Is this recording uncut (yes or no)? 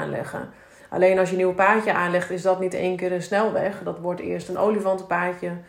yes